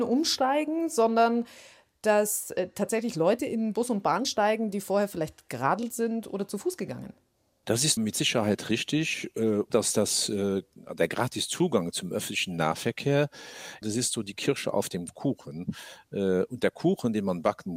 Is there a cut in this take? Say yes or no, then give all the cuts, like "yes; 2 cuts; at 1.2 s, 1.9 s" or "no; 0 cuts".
yes; 3 cuts; at 8.0 s, 9.7 s, 13.8 s